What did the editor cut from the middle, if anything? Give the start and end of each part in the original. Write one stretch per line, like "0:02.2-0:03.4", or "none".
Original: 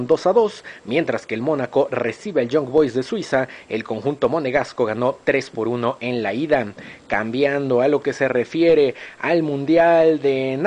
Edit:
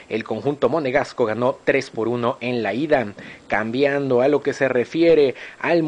none